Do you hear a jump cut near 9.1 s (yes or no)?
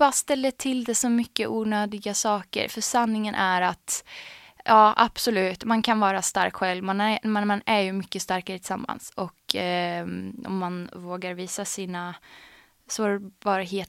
no